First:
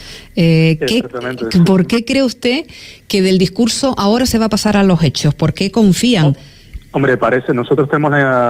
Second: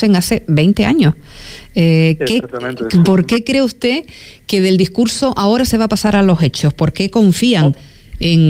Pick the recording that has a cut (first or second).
first